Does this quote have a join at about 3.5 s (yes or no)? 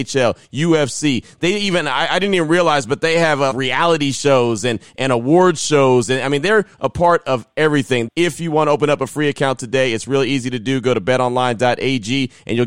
yes